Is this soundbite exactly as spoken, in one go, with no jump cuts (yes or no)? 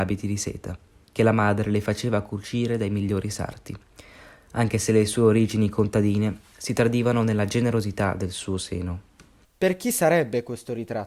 no